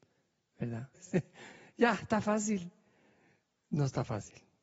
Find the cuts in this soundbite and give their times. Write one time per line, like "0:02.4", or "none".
0:00.9